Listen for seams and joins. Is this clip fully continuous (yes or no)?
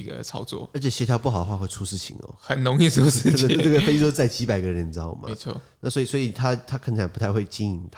no